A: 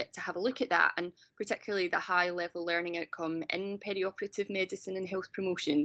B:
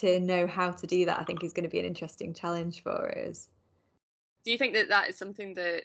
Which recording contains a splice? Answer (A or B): B